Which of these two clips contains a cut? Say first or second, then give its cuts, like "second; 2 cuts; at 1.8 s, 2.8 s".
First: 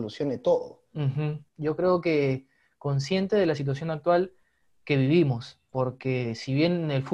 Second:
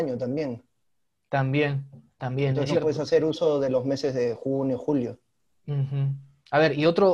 first; 1 cut; at 1.5 s